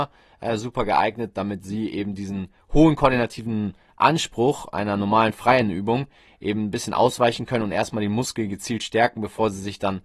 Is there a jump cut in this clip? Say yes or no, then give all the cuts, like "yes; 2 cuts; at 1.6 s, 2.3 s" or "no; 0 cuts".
no; 0 cuts